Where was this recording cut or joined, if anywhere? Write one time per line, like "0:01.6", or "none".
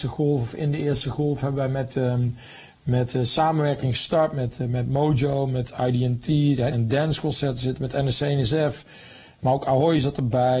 0:06.7

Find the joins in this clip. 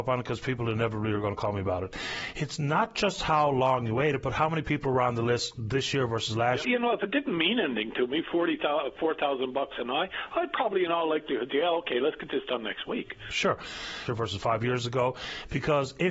0:06.6
0:14.1

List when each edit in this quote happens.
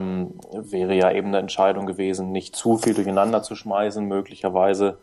none

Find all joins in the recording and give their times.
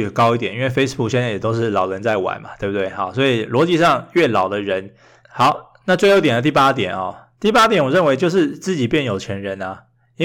0:05.2

